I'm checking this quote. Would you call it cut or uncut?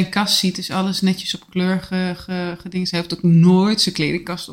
uncut